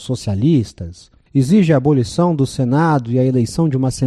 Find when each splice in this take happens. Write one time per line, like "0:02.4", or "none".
0:01.3